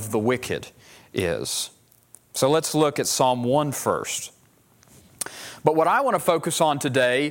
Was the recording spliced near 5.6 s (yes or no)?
yes